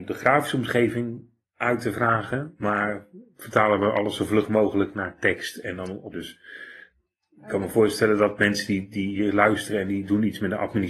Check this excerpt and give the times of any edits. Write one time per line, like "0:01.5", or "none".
0:06.1

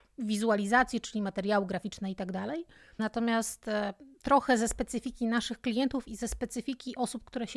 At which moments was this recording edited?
0:03.0
0:04.1

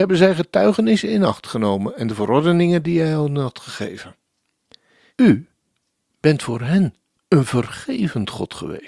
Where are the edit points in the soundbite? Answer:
0:05.1

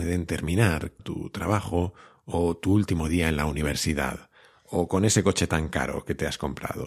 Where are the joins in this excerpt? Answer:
0:01.0

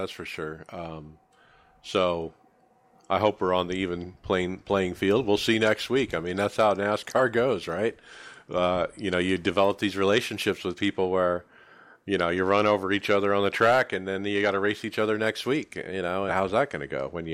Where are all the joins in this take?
0:16.3

